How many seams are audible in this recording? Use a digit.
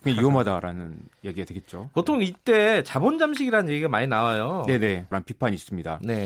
1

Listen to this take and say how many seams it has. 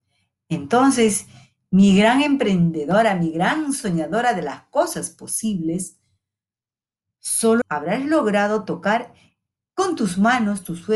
1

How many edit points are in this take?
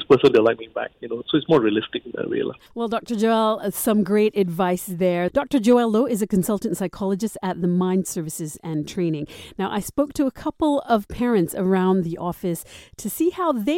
0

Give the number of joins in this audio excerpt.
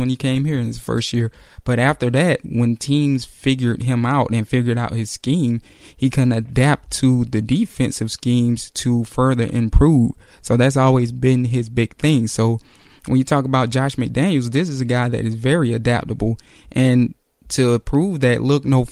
0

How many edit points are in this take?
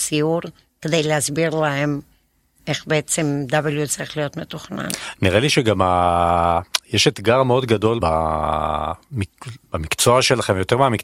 1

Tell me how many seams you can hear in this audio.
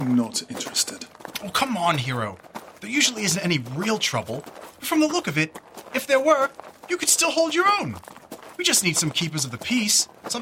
0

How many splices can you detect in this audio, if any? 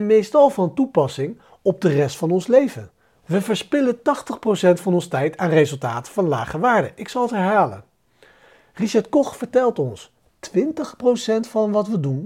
1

